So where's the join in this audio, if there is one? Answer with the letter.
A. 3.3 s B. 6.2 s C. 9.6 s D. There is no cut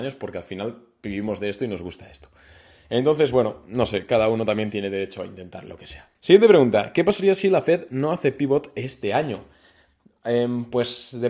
B